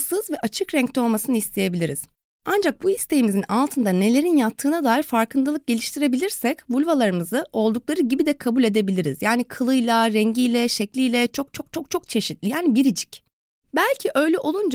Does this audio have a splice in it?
no; 0 cuts

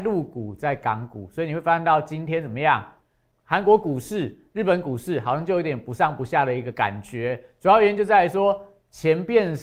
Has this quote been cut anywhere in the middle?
yes; 1 cut; at 3.3 s

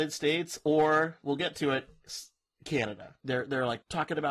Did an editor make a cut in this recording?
yes; 1 cut; at 3.2 s

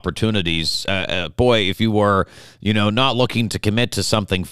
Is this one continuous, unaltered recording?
yes; 0 cuts

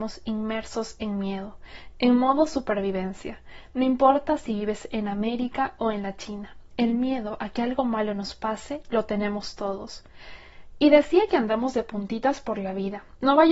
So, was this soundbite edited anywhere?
no; 0 cuts

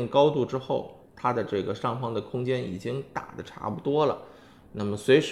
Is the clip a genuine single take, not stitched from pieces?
yes; 0 cuts

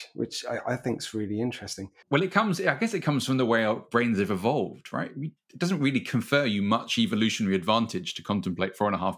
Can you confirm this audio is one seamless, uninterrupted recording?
yes; 0 cuts

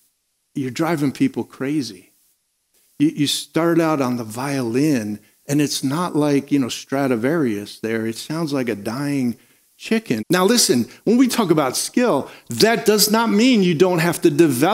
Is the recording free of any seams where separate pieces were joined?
no; 1 cut; at 10.2 s

